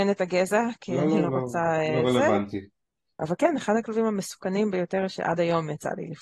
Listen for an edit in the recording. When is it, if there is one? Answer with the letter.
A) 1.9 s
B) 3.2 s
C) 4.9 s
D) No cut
B